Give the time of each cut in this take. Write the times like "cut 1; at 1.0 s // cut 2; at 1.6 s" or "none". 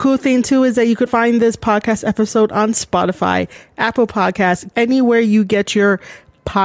cut 1; at 1.1 s // cut 2; at 4.7 s